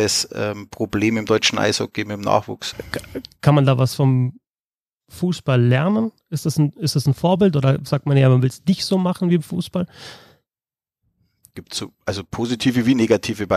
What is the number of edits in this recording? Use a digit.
1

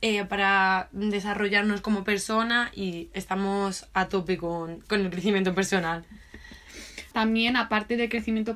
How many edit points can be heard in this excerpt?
1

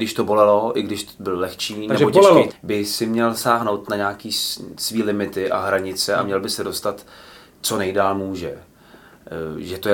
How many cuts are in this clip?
1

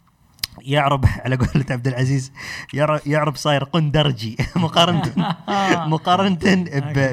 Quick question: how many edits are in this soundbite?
0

